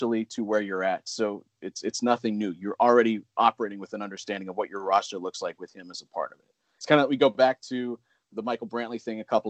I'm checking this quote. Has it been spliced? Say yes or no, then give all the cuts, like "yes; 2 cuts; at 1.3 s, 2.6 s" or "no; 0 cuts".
no; 0 cuts